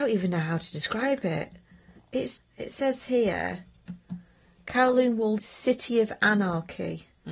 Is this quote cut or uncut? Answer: cut